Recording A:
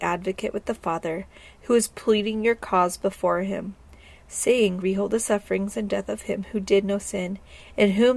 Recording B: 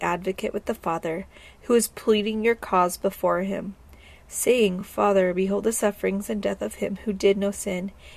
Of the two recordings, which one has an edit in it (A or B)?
A